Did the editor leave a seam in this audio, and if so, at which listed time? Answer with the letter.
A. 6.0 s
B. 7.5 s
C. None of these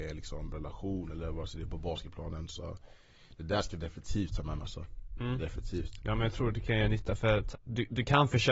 B